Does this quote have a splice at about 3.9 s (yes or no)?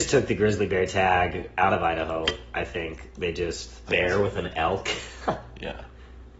yes